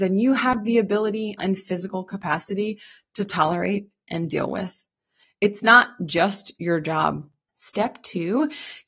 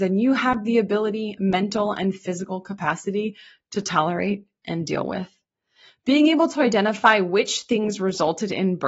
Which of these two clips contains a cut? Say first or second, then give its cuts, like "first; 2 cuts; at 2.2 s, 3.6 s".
first; 3 cuts; at 1.4 s, 5.2 s, 7.5 s